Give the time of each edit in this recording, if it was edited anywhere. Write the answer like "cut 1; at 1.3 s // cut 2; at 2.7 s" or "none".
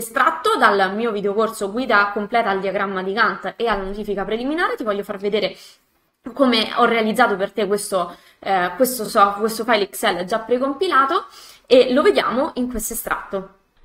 none